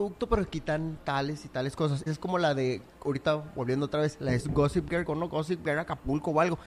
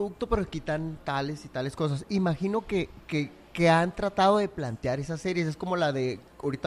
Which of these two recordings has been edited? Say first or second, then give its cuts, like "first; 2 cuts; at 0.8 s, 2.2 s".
first; 2 cuts; at 2.1 s, 5.1 s